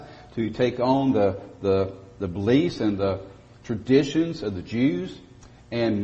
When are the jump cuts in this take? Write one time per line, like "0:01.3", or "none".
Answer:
none